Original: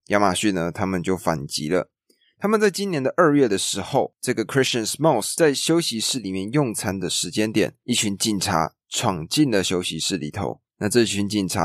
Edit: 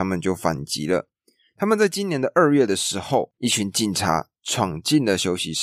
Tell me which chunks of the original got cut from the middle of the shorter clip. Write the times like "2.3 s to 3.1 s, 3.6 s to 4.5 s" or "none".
4.2 s to 7.8 s

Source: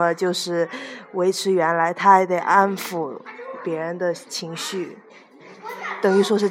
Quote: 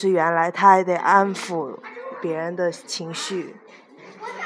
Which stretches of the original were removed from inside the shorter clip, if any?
none

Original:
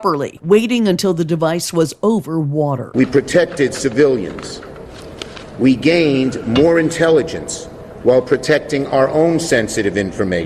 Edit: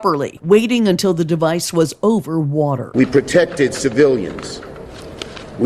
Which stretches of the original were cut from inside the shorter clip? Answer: none

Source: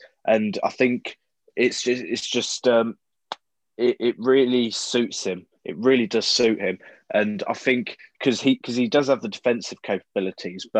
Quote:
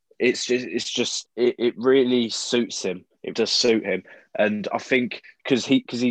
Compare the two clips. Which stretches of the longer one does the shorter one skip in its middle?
2.6 s to 3.7 s, 5.7 s to 6.1 s

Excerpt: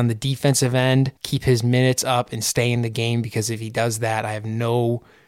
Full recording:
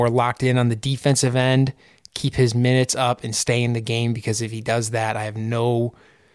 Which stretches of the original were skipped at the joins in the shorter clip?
1.8 s to 2.1 s

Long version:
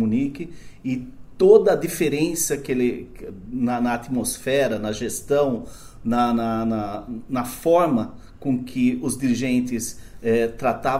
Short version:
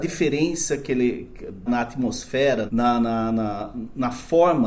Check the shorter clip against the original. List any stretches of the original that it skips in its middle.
3.5 s to 3.8 s, 4.8 s to 6.0 s

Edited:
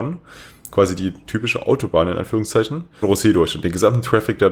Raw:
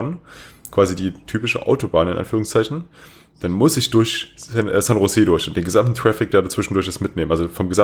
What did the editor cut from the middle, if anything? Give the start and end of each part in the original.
3.0 s to 4.9 s

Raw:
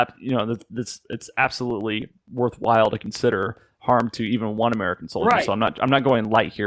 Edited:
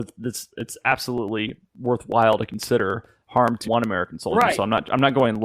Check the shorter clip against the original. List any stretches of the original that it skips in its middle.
4.2 s to 4.5 s

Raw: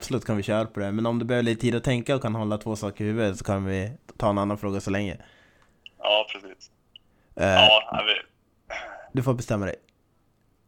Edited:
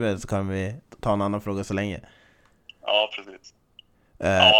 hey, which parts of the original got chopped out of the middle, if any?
none

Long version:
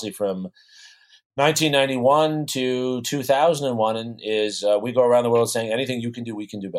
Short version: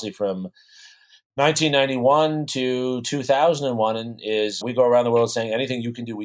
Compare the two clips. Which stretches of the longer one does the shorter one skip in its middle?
4.6 s to 4.8 s

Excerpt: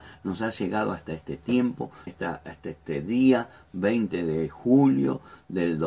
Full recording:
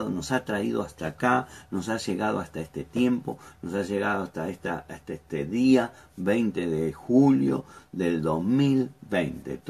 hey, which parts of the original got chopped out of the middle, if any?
3.5 s to 4.5 s

